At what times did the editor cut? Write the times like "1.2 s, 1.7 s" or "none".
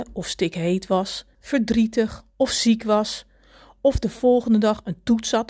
1.3 s